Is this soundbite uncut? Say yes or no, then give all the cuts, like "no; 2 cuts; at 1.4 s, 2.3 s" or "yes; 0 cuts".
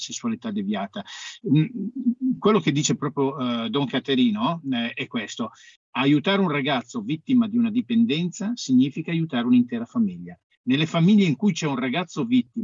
yes; 0 cuts